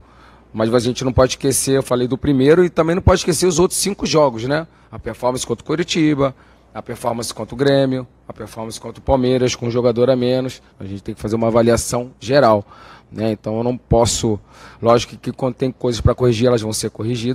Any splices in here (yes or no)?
yes